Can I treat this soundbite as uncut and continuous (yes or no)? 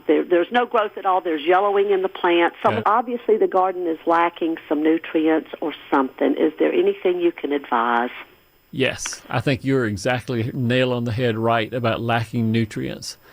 no